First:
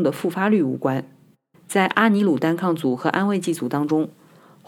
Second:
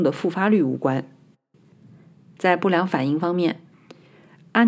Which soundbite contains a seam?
first; 1 cut; at 1.5 s

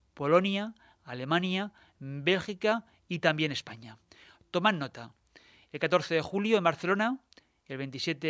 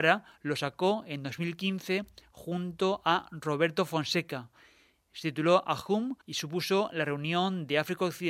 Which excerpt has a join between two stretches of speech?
second; 1 cut; at 6.2 s

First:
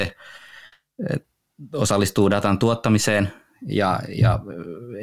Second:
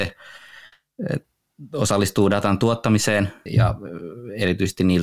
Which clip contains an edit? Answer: second; 1 cut; at 3.5 s

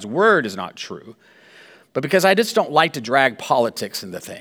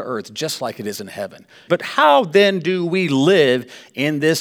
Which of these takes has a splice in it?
second; 1 cut; at 1.7 s

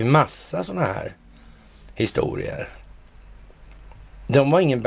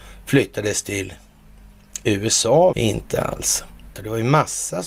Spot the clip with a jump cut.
second; 2 cuts; at 2.7 s, 3.9 s

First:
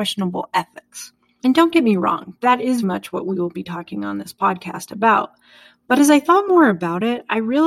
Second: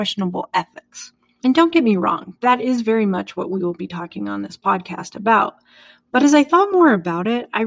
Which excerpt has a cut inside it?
first; 1 cut; at 2.8 s

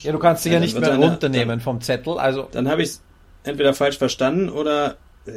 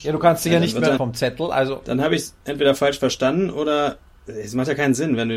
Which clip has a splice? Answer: second; 2 cuts; at 1.0 s, 2.4 s

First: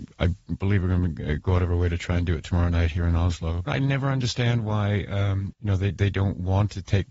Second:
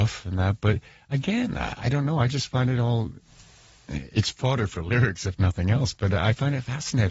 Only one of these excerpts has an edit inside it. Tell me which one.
first; 2 cuts; at 3.7 s, 5.5 s

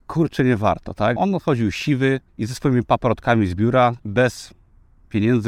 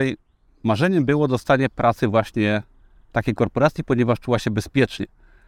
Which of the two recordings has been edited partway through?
first; 3 cuts; at 1.2 s, 2.3 s, 4.0 s

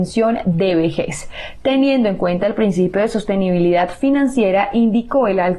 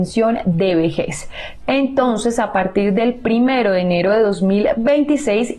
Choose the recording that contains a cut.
second; 1 cut; at 1.6 s

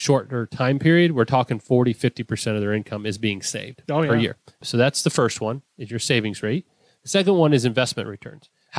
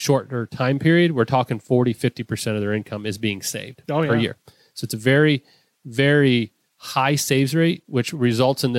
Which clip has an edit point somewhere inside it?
first; 1 cut; at 4.5 s

